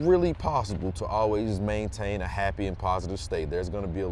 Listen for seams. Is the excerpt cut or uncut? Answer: uncut